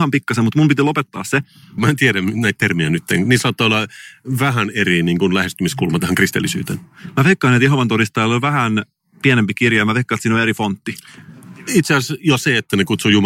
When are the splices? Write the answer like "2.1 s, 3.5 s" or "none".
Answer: 1.8 s

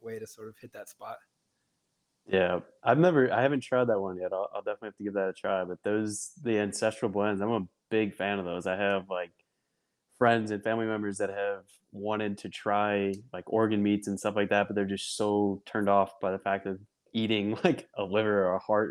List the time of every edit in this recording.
none

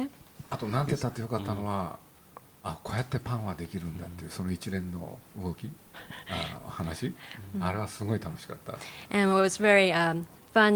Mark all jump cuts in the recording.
none

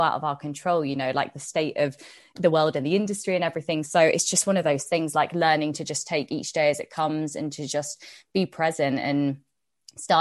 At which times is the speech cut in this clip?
none

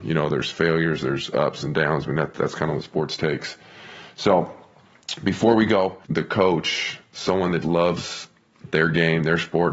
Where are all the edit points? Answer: 6.0 s, 7.6 s

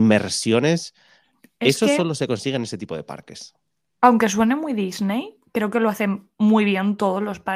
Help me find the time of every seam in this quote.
none

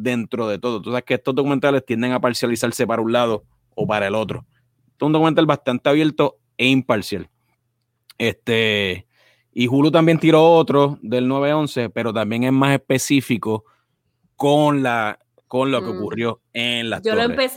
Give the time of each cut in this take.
none

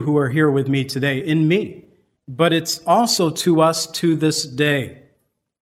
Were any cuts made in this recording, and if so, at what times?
2.2 s

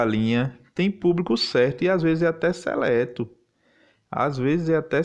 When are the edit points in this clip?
none

